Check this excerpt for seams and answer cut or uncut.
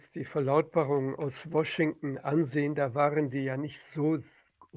uncut